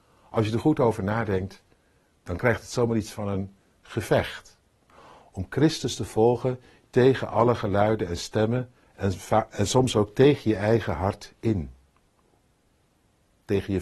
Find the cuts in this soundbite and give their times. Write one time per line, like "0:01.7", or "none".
none